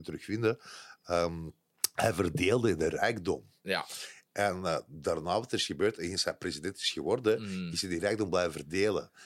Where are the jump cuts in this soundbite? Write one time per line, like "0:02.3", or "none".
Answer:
none